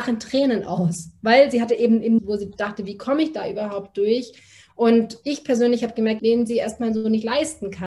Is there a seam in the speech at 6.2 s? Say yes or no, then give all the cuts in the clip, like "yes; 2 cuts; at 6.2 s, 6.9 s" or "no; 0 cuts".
yes; 2 cuts; at 2.2 s, 6.2 s